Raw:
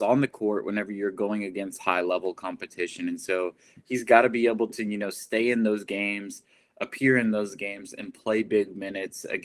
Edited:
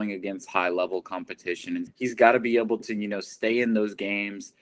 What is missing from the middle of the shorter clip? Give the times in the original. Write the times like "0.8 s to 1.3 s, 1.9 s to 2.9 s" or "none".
3.2 s to 3.7 s